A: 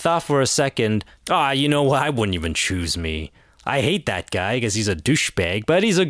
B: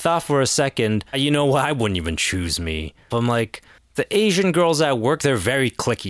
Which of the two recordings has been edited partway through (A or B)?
B